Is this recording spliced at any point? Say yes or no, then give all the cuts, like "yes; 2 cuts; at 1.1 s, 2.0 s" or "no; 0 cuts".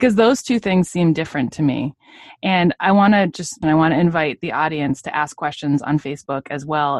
yes; 1 cut; at 3.6 s